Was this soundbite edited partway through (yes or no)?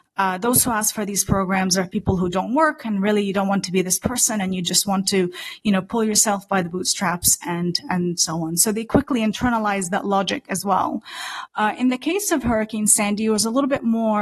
no